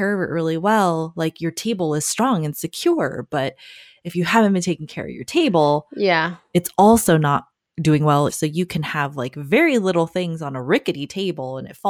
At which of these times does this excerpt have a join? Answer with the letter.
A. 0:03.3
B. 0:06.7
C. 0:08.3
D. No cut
C